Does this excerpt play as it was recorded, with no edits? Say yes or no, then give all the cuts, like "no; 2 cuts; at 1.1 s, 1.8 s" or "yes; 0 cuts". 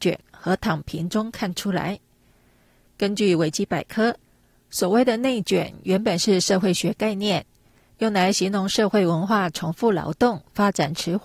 yes; 0 cuts